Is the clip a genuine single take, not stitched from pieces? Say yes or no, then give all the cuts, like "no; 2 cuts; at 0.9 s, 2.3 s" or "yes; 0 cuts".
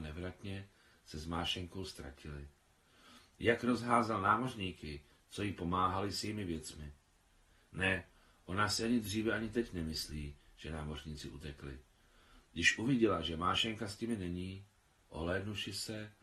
yes; 0 cuts